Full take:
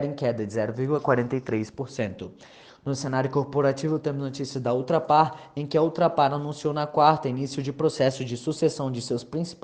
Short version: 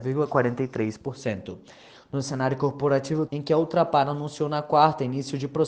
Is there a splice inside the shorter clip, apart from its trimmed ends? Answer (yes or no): yes